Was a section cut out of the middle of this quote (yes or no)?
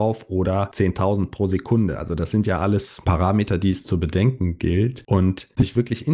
no